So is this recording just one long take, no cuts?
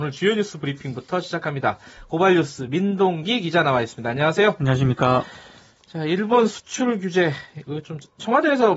yes; 0 cuts

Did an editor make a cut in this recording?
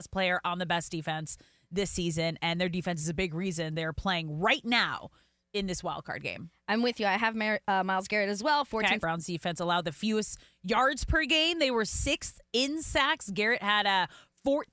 yes; 1 cut; at 9.0 s

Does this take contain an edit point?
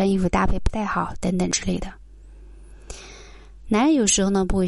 no; 0 cuts

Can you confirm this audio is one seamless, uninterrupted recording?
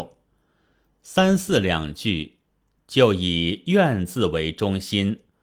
yes; 0 cuts

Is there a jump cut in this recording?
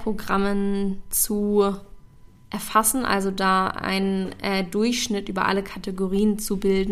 no; 0 cuts

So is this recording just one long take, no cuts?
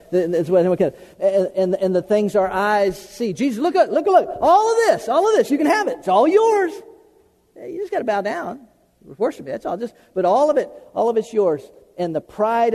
yes; 0 cuts

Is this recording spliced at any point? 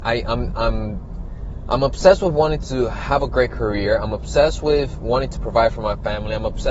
no; 0 cuts

